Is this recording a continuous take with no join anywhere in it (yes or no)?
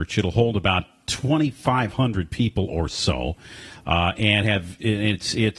yes